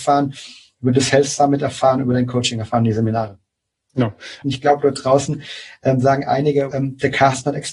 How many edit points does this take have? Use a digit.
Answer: 2